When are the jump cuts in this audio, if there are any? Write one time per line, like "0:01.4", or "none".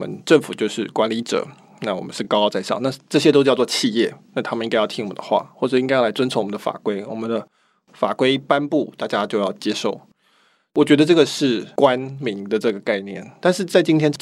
none